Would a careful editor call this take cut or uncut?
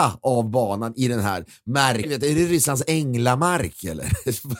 cut